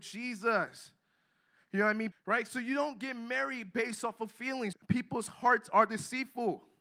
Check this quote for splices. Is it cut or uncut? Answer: cut